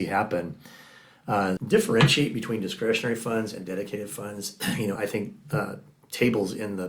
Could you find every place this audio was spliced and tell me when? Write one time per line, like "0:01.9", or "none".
0:01.6
0:05.0